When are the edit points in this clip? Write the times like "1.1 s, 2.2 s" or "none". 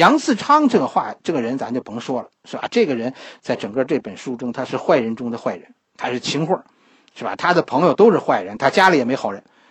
none